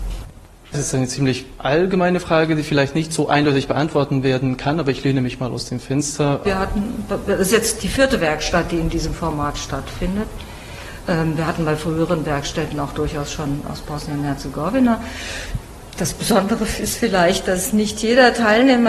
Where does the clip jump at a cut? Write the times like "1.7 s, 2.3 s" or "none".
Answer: 6.4 s